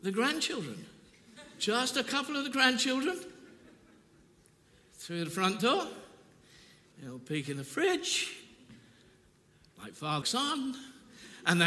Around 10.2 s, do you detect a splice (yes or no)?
yes